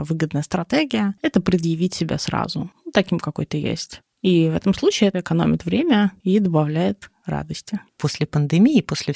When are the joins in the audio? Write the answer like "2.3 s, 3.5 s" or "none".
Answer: none